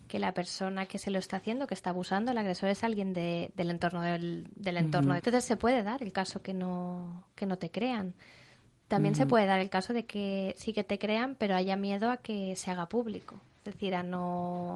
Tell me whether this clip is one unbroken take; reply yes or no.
no